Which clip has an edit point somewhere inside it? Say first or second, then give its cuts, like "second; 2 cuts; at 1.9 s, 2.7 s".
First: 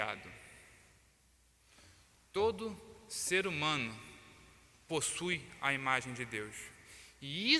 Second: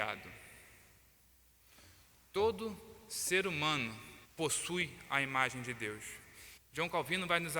second; 2 cuts; at 4.2 s, 6.6 s